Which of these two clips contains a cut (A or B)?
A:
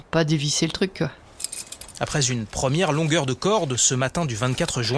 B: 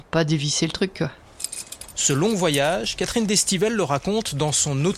A